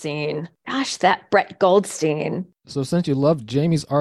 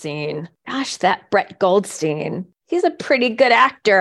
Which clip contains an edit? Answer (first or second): first